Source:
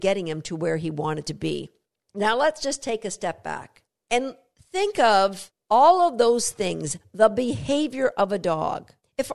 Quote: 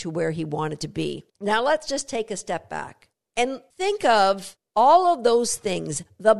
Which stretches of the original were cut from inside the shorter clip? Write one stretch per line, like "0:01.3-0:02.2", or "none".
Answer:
0:01.8-0:02.0
0:04.4-0:04.6